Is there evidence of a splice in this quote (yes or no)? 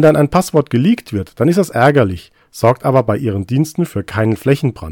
no